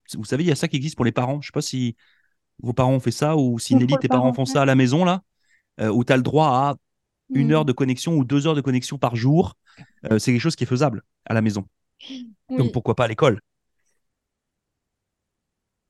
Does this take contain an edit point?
no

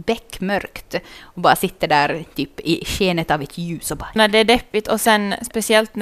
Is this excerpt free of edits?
no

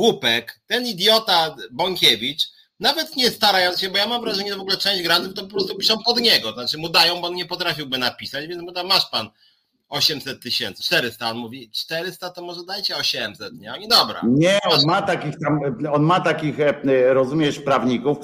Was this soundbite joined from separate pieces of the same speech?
yes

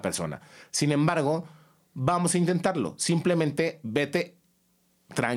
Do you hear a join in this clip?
no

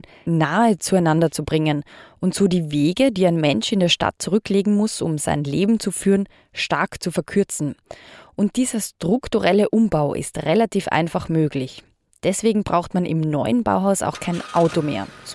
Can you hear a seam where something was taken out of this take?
no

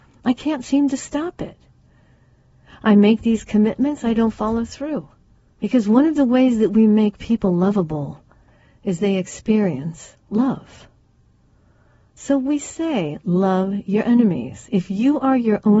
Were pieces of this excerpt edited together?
yes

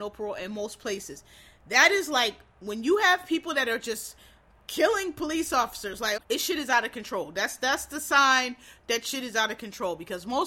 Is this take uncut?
no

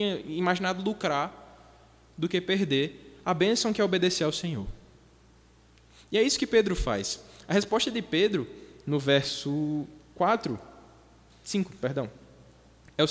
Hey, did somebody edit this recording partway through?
no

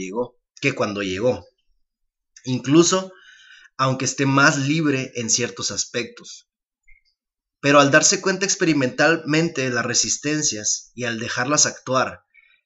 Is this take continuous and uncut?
yes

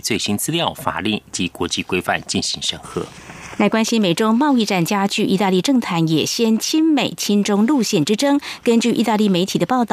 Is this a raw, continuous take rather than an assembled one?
yes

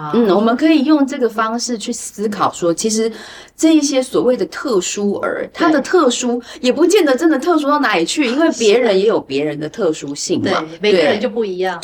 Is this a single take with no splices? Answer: yes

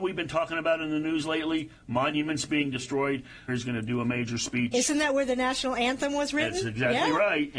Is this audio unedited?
no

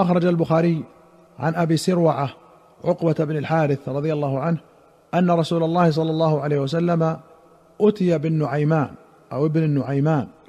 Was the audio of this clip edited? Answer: no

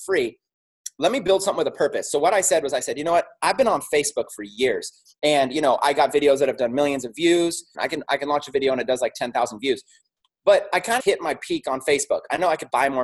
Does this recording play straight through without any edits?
no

